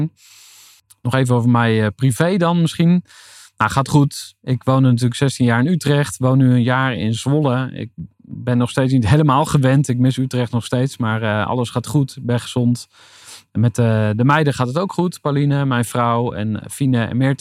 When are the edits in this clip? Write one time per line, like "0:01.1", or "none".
none